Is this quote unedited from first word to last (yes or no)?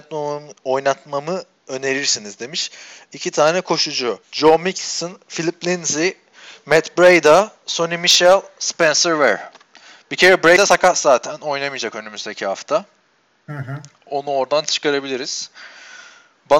no